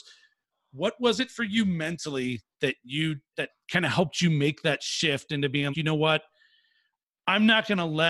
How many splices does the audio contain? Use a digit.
2